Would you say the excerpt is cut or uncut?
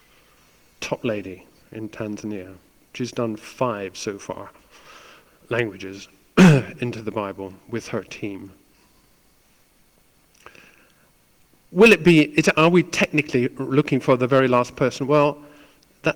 uncut